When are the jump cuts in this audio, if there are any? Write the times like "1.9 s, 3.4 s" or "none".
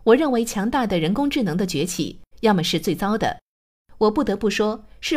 2.3 s